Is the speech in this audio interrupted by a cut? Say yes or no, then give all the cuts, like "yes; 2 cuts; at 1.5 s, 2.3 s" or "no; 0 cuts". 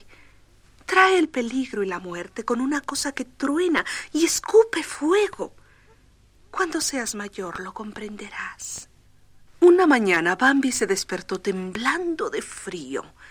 no; 0 cuts